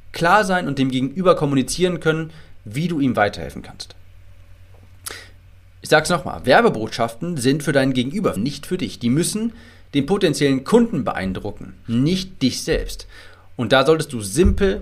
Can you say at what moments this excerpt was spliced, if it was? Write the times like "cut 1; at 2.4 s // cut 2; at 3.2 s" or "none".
cut 1; at 8.4 s